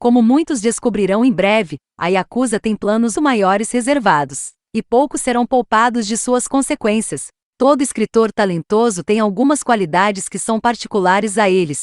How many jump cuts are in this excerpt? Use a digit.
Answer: 1